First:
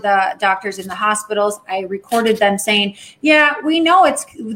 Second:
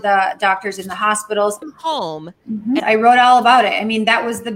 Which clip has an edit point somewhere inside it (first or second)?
second